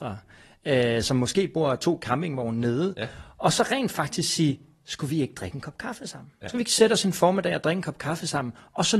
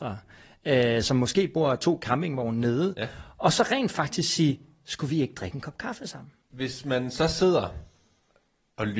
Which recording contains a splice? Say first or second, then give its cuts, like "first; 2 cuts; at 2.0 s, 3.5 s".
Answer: second; 1 cut; at 6.4 s